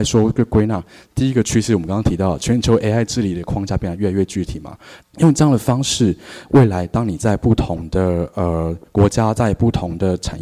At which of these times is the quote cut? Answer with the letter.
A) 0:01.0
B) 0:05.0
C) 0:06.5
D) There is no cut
B